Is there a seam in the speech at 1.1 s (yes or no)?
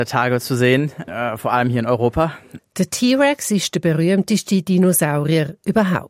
yes